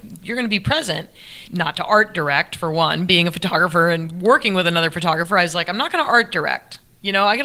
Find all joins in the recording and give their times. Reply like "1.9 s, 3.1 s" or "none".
1.5 s